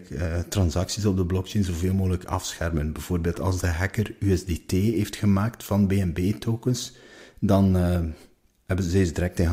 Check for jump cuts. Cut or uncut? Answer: uncut